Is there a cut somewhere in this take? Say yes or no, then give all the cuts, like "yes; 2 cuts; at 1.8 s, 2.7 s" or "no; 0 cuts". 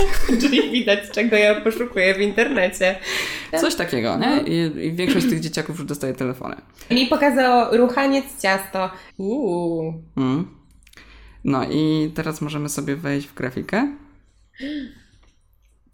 yes; 3 cuts; at 3.5 s, 6.9 s, 9.1 s